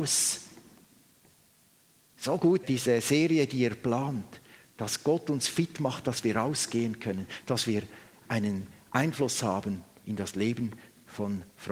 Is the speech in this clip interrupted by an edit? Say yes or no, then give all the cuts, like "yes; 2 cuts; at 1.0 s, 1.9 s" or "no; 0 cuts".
yes; 1 cut; at 2.6 s